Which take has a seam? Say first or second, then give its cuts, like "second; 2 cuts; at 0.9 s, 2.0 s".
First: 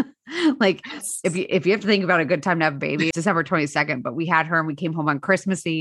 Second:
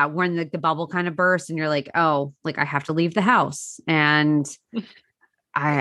first; 1 cut; at 3.1 s